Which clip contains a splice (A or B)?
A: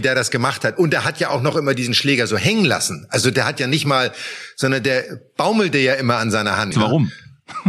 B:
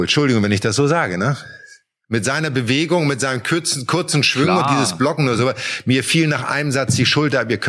A